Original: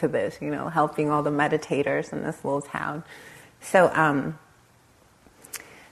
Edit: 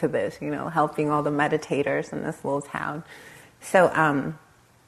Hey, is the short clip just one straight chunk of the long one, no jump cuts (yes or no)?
yes